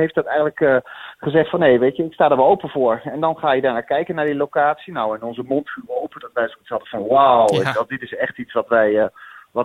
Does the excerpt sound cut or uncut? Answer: uncut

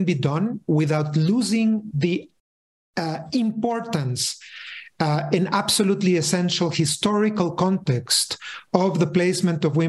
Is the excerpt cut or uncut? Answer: uncut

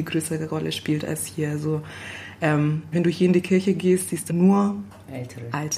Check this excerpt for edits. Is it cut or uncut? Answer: cut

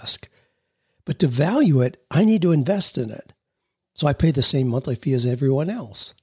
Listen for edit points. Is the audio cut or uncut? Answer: uncut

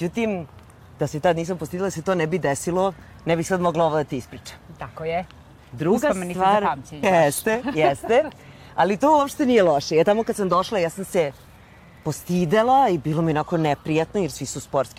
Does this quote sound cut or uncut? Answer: cut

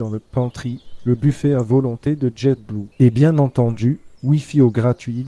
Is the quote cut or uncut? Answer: cut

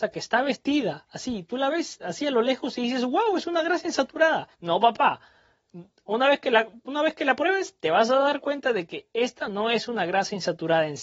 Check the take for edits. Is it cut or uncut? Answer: cut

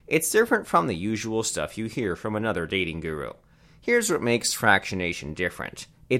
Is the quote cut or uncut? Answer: uncut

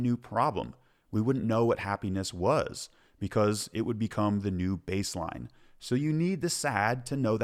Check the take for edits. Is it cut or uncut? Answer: uncut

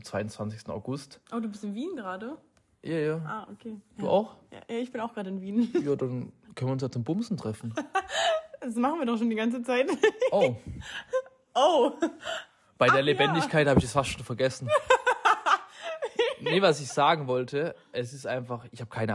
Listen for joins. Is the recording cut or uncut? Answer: uncut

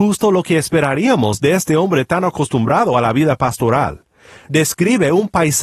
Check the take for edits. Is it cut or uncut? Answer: uncut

